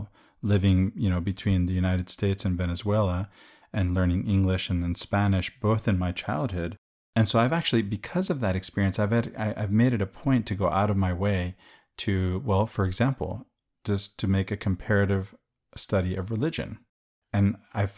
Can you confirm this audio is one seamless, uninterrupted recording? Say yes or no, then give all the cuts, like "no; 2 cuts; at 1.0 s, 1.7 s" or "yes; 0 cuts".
yes; 0 cuts